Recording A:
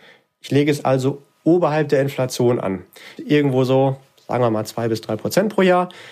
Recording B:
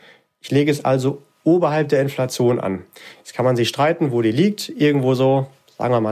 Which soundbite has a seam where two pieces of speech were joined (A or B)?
A